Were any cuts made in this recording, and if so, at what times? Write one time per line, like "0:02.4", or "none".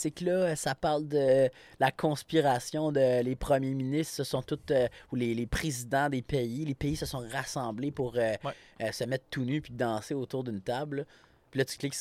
none